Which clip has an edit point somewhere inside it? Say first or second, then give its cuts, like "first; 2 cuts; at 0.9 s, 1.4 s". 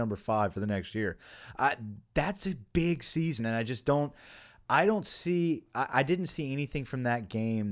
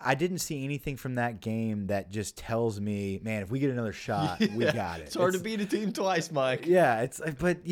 first; 1 cut; at 3.4 s